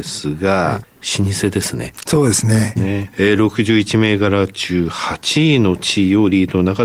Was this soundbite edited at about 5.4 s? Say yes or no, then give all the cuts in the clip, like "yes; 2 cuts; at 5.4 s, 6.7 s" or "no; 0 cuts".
no; 1 cut; at 2.8 s